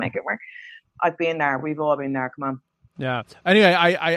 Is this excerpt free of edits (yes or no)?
yes